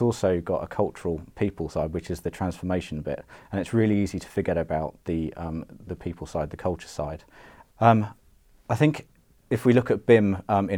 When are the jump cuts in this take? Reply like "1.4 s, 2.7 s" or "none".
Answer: 5.9 s, 7.6 s